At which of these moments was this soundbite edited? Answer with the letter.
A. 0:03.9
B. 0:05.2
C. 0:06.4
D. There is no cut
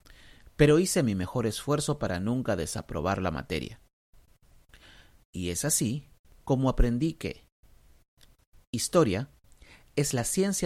B